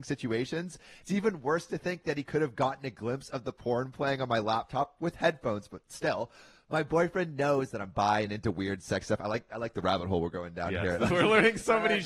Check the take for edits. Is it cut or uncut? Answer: cut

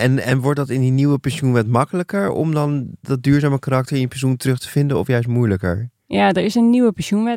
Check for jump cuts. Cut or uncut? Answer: uncut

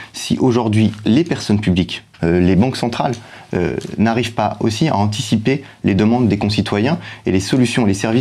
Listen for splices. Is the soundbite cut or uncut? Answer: cut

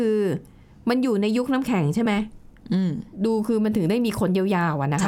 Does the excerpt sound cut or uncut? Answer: uncut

